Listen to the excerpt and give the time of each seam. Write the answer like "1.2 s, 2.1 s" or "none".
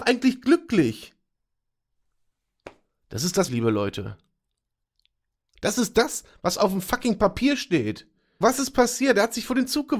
3.5 s, 8.4 s